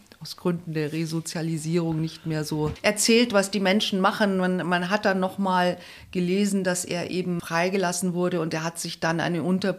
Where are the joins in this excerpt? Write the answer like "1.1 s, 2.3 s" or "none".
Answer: none